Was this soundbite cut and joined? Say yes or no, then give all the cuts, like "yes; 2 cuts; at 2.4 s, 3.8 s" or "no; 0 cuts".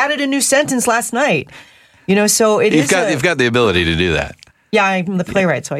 no; 0 cuts